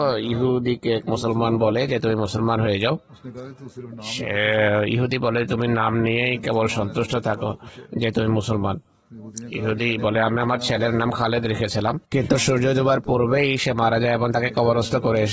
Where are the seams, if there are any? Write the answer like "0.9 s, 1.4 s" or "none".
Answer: 12.1 s

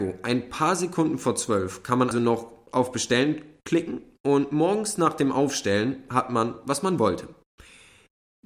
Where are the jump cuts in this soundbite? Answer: 2.1 s

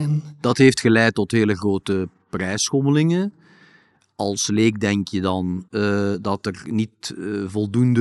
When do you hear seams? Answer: 5.7 s

